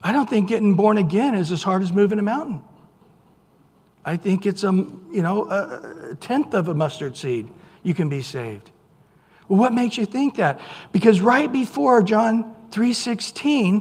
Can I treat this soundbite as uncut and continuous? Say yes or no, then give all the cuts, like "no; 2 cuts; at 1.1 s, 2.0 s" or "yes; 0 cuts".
yes; 0 cuts